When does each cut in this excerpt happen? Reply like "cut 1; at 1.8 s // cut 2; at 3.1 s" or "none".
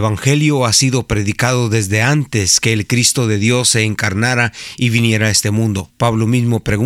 cut 1; at 5.9 s